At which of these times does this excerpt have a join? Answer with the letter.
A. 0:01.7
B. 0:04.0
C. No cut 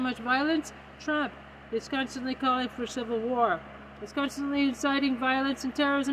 A